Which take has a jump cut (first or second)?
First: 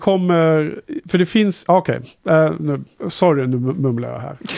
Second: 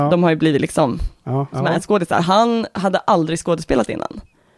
second